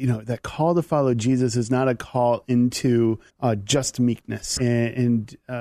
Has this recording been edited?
yes; 2 cuts; at 3.3 s, 4.6 s

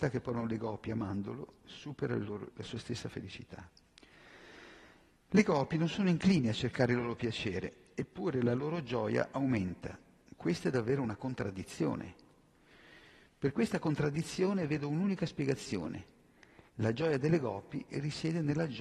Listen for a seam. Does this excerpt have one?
yes; 1 cut; at 2.5 s

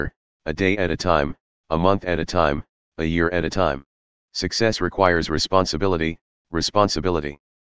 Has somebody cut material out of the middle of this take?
yes; 2 cuts; at 4.1 s, 6.4 s

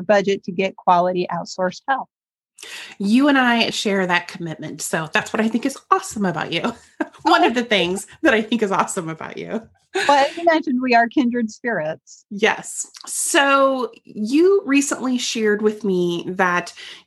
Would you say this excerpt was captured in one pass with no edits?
no; 1 cut; at 3.7 s

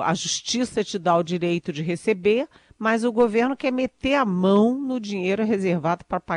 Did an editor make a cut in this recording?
no; 0 cuts

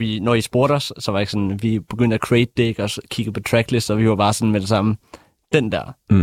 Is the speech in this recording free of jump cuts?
yes; 0 cuts

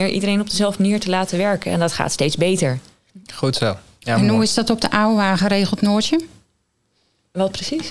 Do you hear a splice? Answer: no; 0 cuts

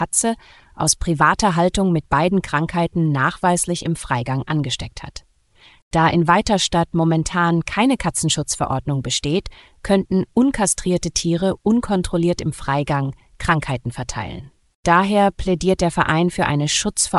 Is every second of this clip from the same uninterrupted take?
yes; 0 cuts

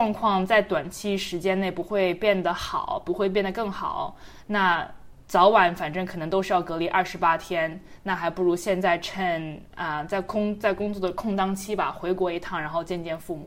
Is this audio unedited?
no; 1 cut; at 5.2 s

